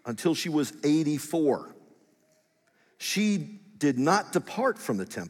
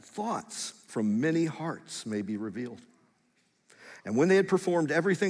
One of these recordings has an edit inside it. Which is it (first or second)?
second